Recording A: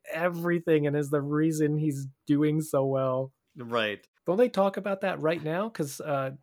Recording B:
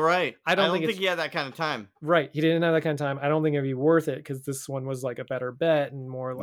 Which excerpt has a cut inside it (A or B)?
A